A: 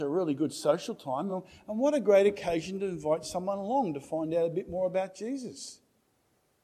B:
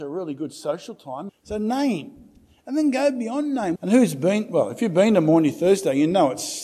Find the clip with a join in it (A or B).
B